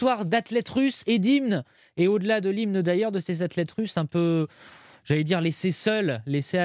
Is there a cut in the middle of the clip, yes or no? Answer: no